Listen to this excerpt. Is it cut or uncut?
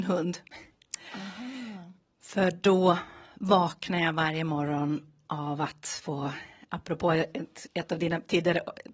uncut